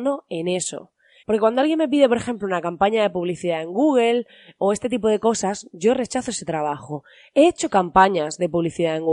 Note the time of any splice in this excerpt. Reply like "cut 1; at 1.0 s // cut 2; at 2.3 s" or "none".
cut 1; at 1.2 s

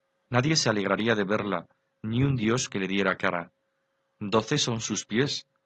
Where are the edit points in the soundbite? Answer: none

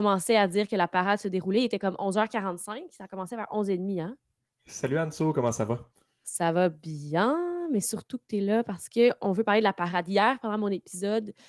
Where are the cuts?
cut 1; at 4.5 s

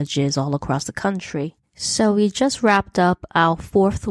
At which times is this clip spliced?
cut 1; at 1.6 s

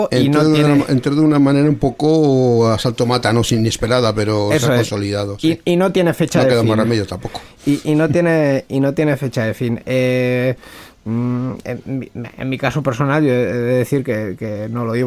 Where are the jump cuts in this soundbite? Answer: none

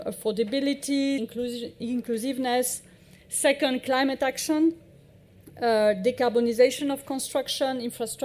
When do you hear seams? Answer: cut 1; at 1.2 s

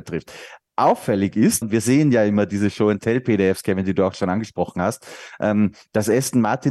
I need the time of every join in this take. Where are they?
cut 1; at 1.6 s

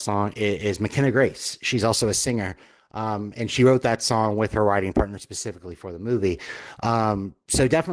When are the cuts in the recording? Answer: none

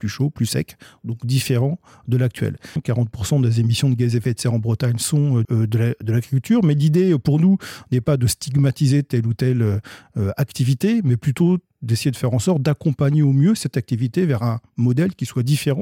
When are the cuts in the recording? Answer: cut 1; at 2.8 s // cut 2; at 5.4 s

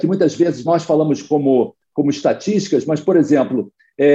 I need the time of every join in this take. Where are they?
none

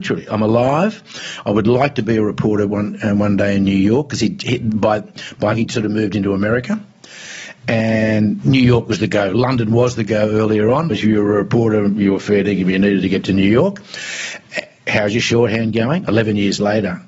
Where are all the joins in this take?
cut 1; at 5.5 s // cut 2; at 10.9 s // cut 3; at 16.0 s

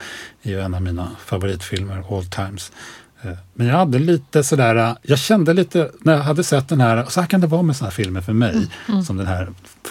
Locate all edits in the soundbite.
none

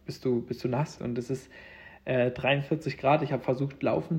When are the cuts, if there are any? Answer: cut 1; at 1.0 s

